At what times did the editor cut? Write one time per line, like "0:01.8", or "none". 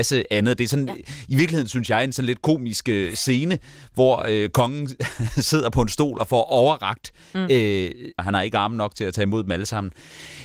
0:08.2